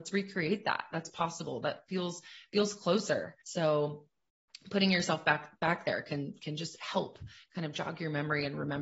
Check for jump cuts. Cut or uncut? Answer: cut